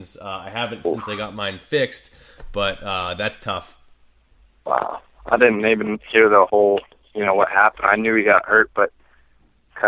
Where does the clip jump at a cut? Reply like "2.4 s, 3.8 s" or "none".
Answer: none